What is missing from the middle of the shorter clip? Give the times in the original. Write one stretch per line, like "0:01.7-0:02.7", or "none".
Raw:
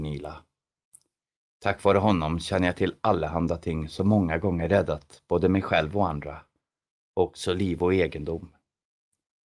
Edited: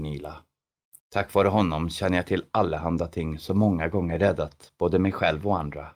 0:01.0-0:01.5